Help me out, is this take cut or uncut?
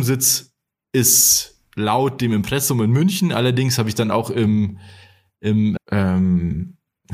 cut